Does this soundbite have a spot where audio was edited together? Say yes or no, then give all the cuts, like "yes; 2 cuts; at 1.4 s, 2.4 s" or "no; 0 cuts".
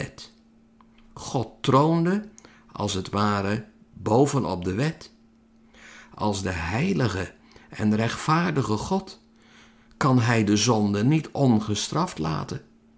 no; 0 cuts